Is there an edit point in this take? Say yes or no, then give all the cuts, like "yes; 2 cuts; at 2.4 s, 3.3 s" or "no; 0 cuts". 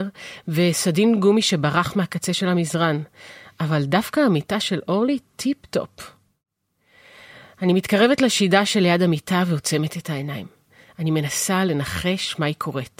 no; 0 cuts